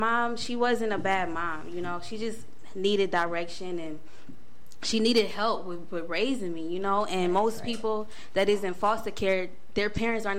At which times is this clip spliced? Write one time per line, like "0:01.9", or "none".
none